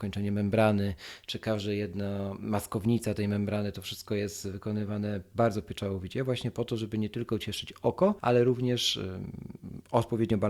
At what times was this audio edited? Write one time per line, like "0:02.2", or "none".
0:08.2